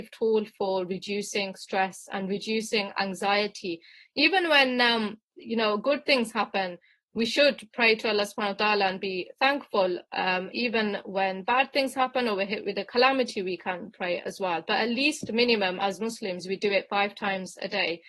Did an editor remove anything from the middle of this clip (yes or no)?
no